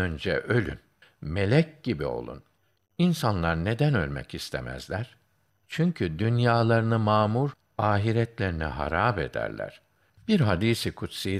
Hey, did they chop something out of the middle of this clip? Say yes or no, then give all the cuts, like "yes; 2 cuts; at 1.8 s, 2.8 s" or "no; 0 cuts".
yes; 2 cuts; at 1.0 s, 10.1 s